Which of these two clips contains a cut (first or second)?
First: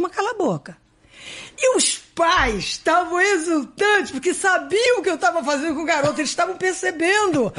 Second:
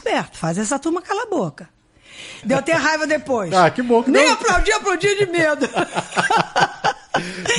second